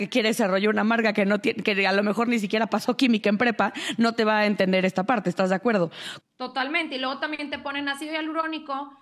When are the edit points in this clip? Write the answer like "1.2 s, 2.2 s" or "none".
6.2 s